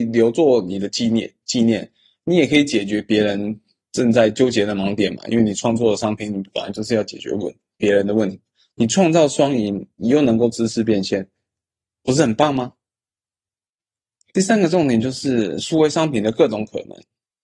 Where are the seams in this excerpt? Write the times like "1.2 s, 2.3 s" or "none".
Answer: none